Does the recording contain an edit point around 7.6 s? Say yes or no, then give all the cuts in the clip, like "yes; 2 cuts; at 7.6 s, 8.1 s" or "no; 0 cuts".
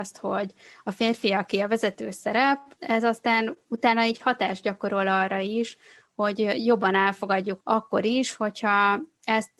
yes; 2 cuts; at 2.8 s, 7.6 s